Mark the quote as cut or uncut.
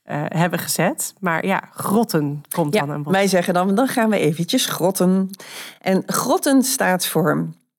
uncut